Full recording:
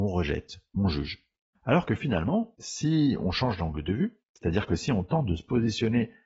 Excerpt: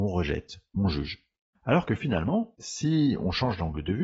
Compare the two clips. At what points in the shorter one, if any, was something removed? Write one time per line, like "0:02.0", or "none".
none